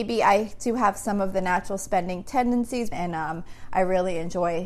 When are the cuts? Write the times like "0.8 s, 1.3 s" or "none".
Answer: 2.9 s